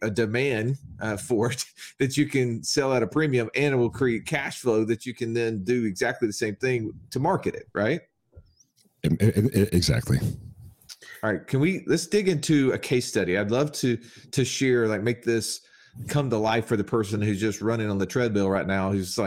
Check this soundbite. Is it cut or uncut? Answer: uncut